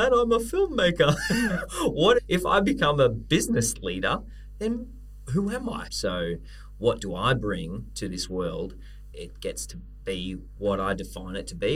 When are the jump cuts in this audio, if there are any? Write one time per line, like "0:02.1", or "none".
0:05.9
0:09.1